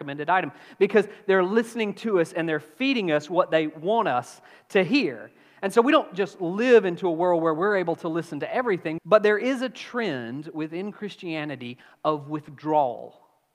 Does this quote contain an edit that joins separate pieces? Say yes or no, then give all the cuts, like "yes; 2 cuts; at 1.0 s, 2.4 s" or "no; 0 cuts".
yes; 1 cut; at 9.0 s